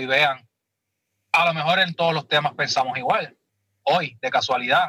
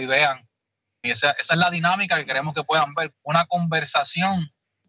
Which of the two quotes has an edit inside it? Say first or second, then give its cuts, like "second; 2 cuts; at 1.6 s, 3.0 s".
second; 2 cuts; at 1.0 s, 3.1 s